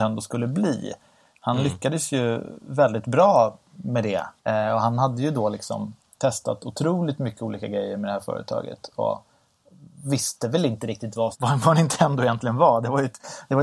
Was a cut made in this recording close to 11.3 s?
yes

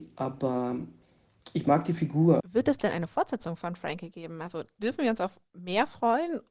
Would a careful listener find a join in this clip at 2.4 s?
yes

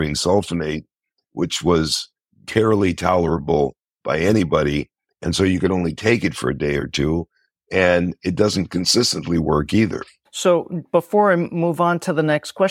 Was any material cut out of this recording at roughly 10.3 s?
yes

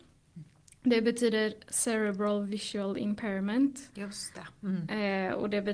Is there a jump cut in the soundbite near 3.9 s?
yes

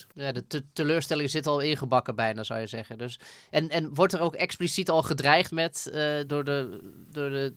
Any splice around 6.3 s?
yes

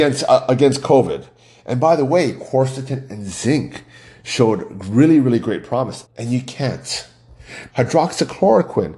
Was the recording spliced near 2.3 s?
no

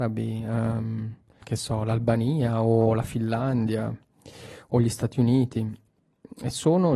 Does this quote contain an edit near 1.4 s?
no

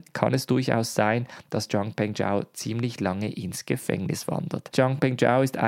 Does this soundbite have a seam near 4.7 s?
yes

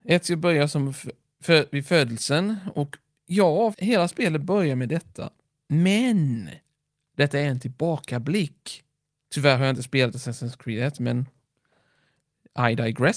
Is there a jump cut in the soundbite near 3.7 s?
yes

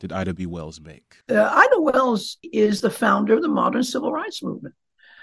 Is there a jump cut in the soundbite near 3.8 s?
no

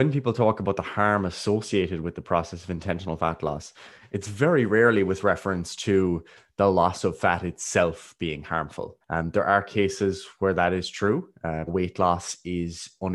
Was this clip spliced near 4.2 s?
no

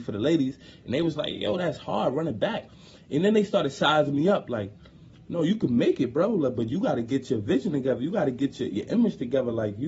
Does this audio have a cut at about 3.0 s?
no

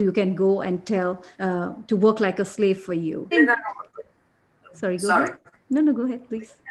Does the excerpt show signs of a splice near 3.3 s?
yes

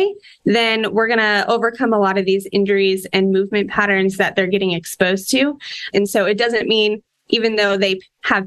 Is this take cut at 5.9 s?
yes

